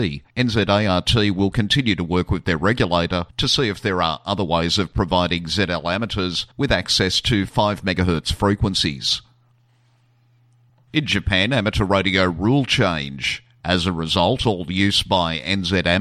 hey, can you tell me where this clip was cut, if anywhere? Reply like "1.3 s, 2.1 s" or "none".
13.6 s